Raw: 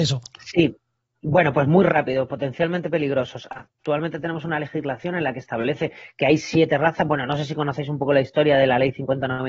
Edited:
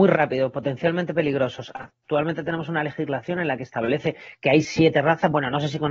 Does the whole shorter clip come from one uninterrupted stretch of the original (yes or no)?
yes